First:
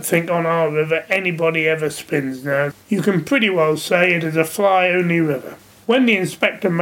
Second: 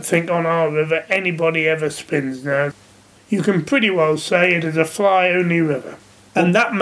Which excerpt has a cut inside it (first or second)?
first